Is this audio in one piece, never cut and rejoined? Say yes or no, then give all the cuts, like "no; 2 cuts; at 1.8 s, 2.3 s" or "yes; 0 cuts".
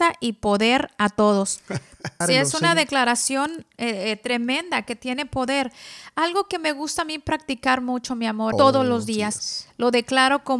no; 2 cuts; at 2.2 s, 8.5 s